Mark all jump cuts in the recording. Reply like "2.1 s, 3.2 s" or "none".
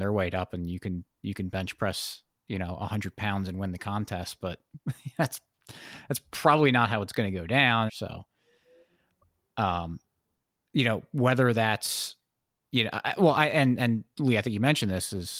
7.9 s, 12.6 s

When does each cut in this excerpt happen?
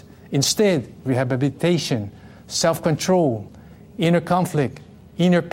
none

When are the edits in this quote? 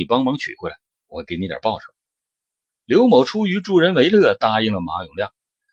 none

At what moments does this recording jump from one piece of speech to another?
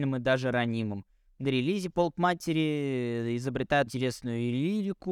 3.9 s

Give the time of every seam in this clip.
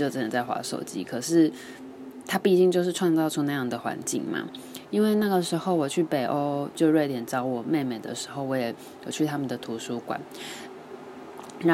none

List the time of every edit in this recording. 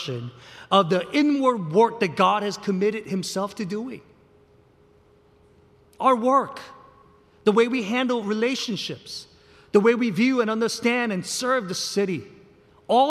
none

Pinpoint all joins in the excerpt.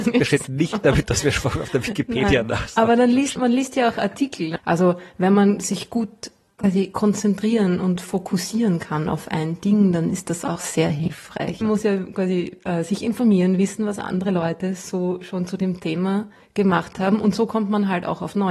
3.4 s, 4.6 s, 11.6 s

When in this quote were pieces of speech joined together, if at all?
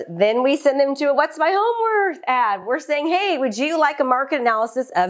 none

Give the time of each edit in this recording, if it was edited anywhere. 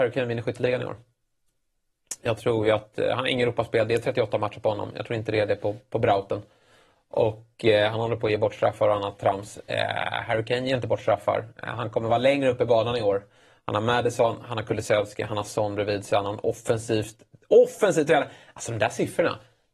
none

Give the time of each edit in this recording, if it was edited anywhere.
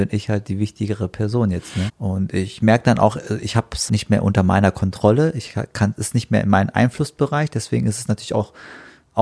1.9 s, 3.9 s

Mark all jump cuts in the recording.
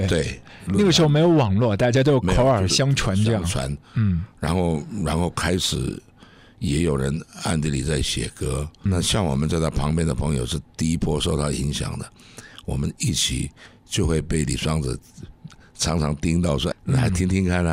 8.9 s, 16.7 s

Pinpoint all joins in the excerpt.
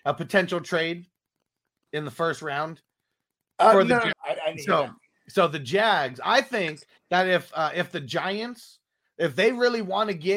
4.1 s

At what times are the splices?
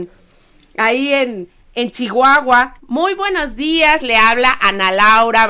2.8 s, 4.0 s

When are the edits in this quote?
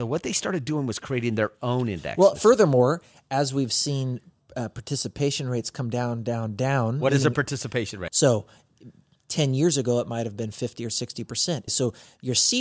8.1 s, 11.7 s

